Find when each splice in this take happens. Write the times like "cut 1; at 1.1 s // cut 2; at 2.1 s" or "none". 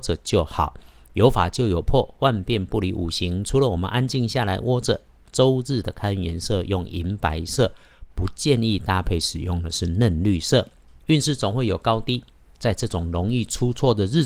cut 1; at 11.0 s